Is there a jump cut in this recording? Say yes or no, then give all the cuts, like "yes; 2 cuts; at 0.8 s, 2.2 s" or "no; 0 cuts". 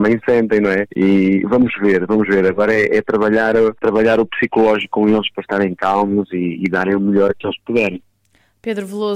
no; 0 cuts